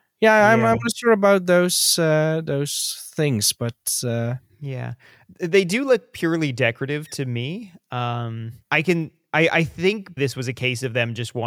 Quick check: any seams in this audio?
yes; 2 cuts; at 8.6 s, 10.2 s

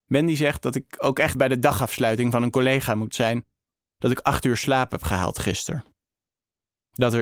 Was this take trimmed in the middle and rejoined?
yes; 2 cuts; at 1.3 s, 3.8 s

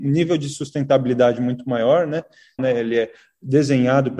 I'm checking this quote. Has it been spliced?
yes; 1 cut; at 2.6 s

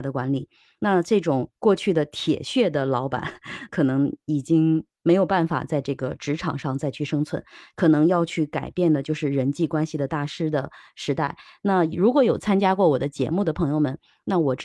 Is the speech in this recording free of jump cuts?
yes; 0 cuts

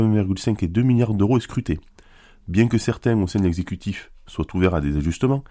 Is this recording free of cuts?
yes; 0 cuts

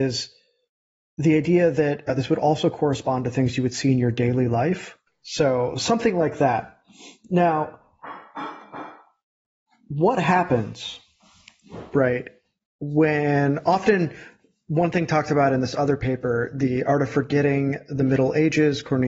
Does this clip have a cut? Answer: yes; 1 cut; at 5.1 s

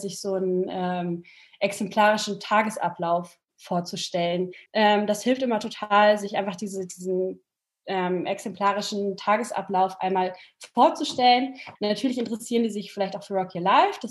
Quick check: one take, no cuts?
no; 2 cuts; at 4.7 s, 11.8 s

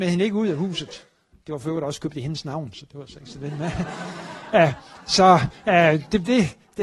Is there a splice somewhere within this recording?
no; 0 cuts

